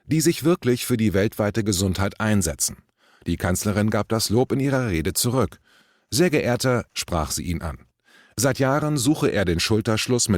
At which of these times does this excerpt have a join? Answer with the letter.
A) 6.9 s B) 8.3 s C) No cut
A